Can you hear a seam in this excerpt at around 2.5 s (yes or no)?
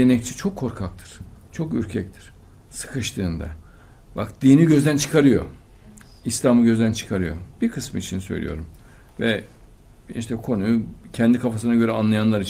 yes